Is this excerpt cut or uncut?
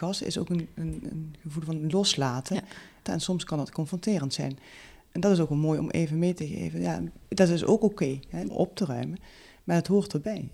cut